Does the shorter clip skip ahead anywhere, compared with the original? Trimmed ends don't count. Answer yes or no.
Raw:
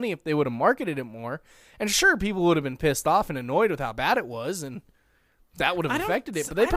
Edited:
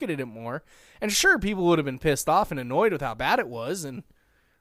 no